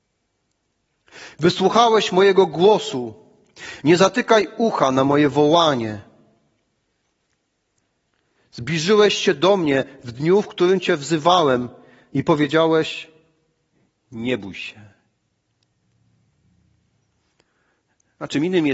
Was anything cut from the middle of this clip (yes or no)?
no